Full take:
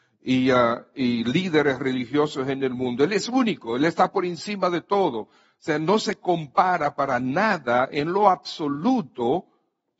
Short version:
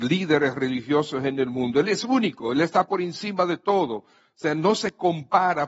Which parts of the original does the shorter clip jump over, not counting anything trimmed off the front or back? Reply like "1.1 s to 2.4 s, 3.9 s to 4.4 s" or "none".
none